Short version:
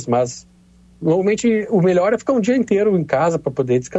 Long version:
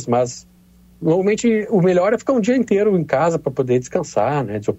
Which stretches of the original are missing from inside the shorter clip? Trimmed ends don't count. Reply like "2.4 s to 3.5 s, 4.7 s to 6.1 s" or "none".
none